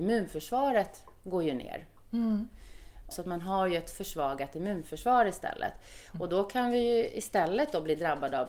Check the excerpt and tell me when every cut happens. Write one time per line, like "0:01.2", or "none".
0:03.1